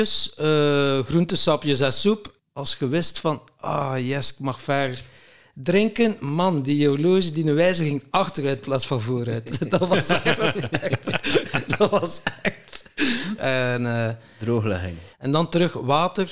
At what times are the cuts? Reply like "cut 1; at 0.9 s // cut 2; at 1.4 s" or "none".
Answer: cut 1; at 2.4 s // cut 2; at 13.4 s // cut 3; at 15.1 s